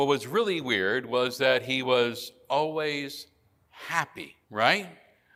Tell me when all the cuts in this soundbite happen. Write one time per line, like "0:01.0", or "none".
0:04.4